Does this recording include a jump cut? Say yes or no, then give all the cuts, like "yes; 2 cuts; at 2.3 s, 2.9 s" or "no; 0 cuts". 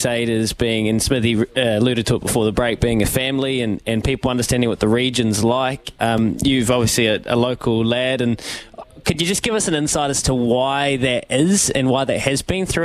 no; 0 cuts